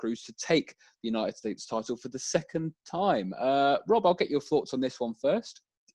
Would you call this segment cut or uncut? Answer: uncut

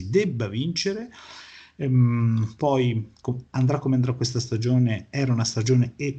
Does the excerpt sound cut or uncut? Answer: uncut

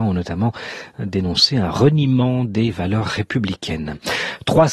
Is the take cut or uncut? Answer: uncut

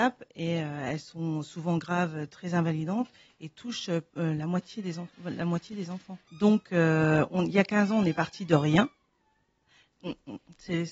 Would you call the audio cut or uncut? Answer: cut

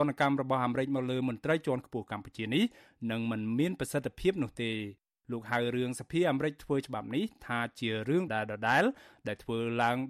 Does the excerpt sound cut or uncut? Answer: cut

